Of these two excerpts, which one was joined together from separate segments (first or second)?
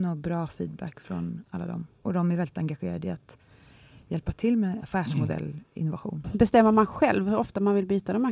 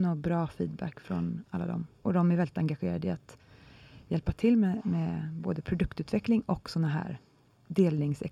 first